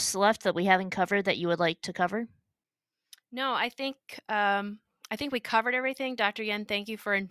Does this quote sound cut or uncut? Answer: uncut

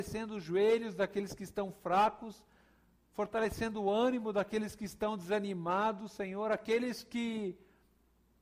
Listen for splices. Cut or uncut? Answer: uncut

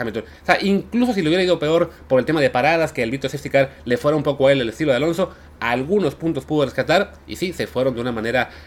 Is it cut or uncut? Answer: uncut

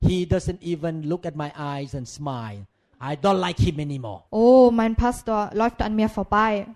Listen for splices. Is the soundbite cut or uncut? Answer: cut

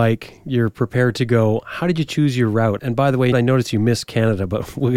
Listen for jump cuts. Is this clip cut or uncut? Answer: cut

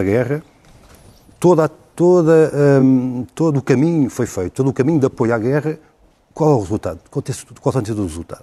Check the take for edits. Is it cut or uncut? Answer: uncut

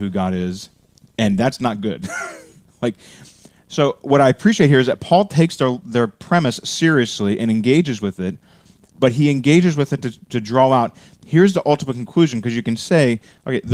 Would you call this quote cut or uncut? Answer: uncut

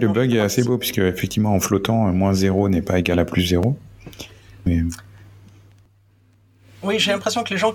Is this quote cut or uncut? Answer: cut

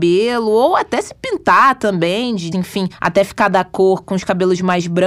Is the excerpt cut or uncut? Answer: cut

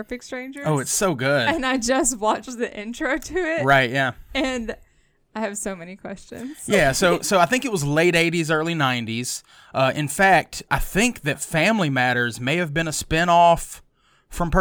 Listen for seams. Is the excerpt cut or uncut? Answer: cut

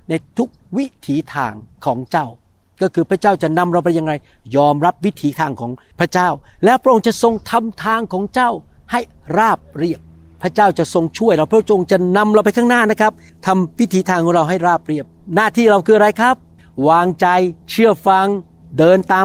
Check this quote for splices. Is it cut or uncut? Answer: cut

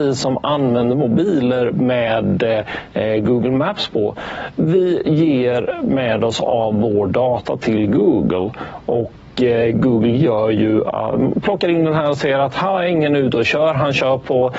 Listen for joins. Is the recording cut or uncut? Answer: uncut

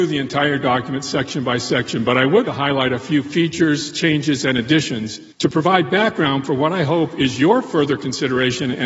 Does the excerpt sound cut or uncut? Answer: cut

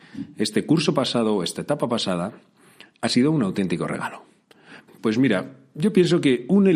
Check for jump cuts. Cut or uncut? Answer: cut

